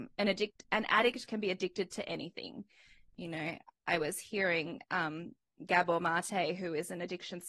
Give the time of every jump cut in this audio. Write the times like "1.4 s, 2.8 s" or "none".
none